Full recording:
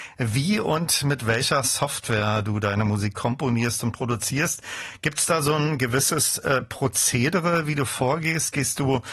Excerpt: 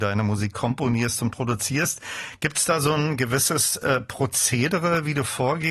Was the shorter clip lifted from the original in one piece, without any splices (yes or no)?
yes